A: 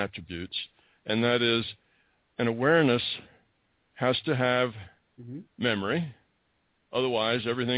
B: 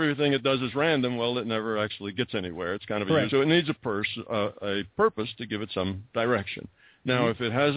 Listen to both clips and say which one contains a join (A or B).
B